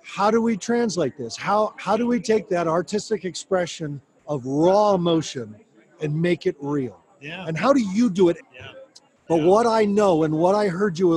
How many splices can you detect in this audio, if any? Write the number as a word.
one